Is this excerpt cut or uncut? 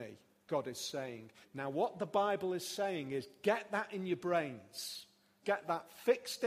cut